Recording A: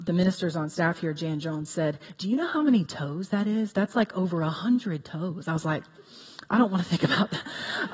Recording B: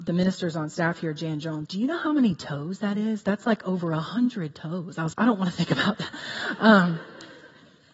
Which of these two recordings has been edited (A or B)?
B